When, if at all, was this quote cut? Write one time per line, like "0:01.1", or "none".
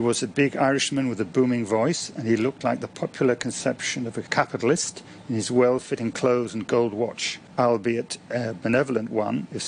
none